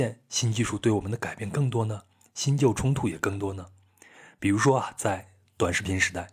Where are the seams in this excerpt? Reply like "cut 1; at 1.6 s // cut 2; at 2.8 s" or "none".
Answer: none